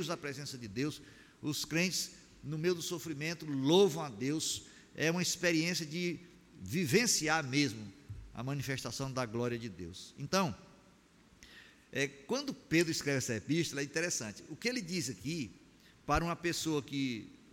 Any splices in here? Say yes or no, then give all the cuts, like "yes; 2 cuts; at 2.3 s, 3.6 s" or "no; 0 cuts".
no; 0 cuts